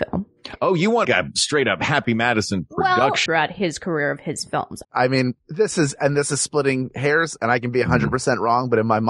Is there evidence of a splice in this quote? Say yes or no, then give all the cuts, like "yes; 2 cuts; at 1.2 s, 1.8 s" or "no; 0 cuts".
yes; 3 cuts; at 1.0 s, 3.3 s, 4.8 s